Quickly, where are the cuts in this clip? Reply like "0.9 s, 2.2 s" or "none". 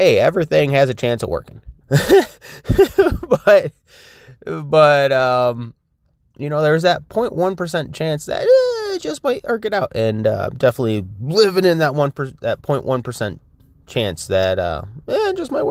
1.8 s